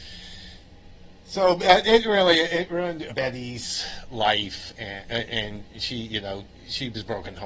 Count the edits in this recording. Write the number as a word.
one